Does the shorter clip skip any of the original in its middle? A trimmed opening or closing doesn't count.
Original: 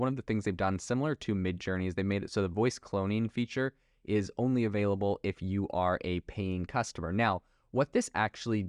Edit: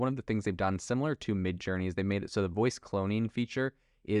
no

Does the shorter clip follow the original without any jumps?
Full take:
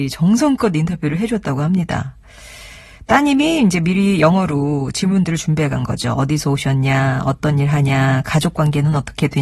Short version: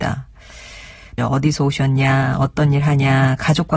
no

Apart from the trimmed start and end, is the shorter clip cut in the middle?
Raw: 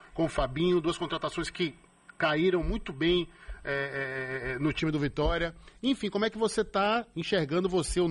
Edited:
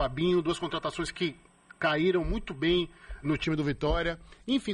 yes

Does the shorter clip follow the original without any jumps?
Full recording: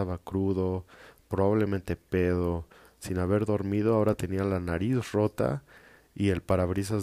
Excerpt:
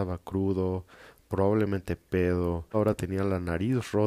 no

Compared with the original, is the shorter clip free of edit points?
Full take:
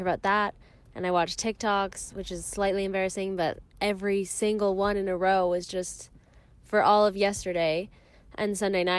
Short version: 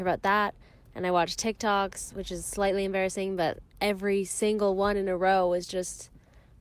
yes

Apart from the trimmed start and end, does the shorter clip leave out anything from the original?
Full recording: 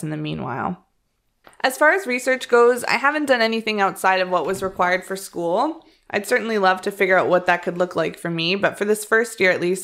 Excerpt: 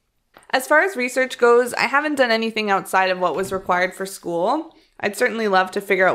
no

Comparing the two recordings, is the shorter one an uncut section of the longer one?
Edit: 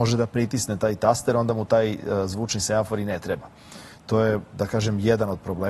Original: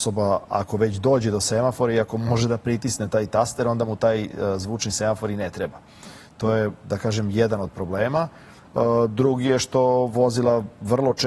yes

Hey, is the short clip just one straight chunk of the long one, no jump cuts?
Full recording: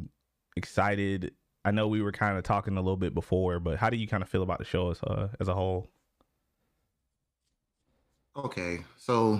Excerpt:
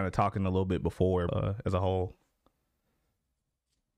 no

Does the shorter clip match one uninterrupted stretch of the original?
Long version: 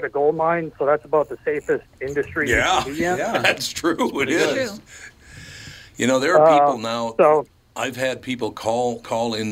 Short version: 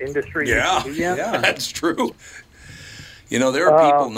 no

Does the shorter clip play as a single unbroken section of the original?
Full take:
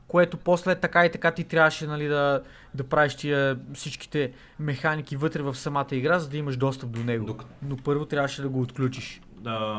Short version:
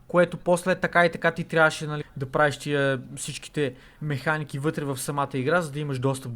no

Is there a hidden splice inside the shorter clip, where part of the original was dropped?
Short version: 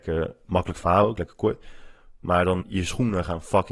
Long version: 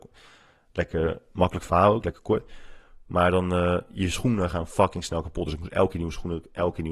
yes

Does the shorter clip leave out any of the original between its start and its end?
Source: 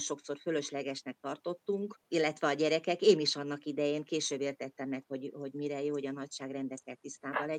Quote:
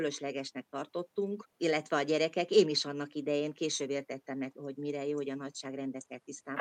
yes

